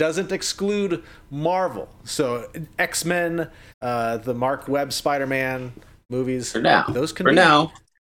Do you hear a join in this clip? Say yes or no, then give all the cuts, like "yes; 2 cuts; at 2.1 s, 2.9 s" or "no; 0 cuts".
yes; 1 cut; at 3.7 s